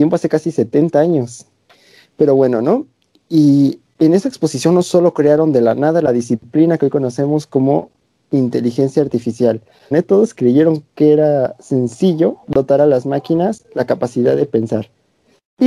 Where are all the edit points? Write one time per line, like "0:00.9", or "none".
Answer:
0:09.9
0:12.4